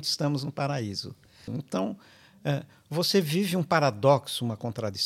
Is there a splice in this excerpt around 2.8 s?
no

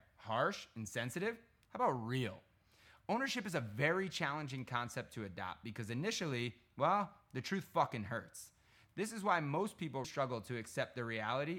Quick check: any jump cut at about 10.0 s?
yes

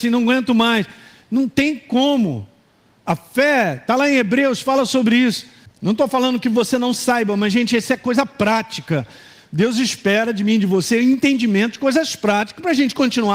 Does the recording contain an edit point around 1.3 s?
no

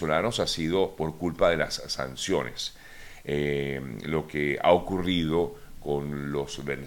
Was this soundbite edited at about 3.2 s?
no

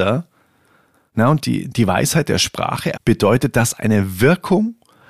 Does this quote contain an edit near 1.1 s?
yes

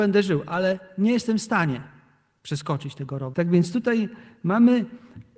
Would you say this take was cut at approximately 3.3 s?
yes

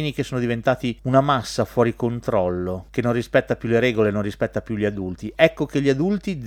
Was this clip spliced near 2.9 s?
no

